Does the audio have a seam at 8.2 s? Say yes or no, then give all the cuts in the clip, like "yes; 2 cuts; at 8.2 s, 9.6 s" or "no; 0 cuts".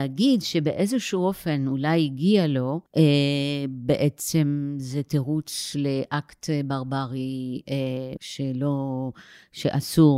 yes; 2 cuts; at 2.9 s, 8.2 s